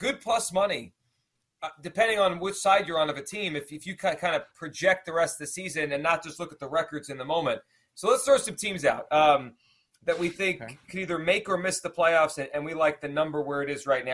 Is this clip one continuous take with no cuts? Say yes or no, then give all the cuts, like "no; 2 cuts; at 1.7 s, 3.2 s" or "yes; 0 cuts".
yes; 0 cuts